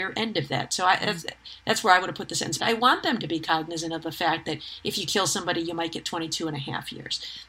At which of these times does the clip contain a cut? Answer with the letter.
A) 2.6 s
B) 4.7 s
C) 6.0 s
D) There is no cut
A